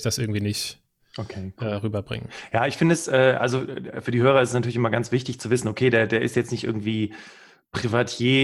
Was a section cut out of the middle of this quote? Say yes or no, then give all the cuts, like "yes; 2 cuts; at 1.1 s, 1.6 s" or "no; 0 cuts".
no; 0 cuts